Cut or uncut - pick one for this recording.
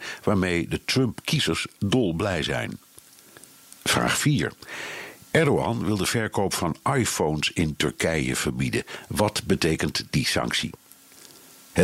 uncut